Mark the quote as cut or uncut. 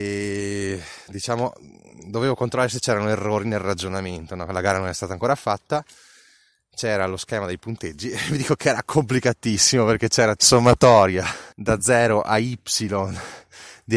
cut